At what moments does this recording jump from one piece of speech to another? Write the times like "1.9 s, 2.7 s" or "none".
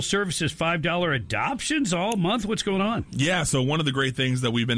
none